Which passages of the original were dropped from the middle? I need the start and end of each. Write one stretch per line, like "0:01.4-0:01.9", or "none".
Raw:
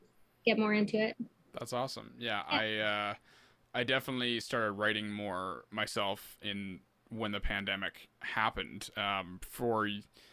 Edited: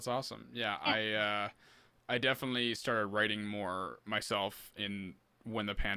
none